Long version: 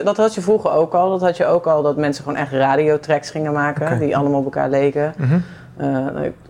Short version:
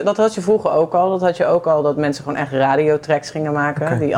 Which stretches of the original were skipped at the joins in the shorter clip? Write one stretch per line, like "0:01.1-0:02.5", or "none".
none